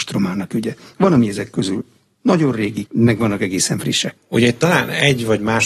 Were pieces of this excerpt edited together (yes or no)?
yes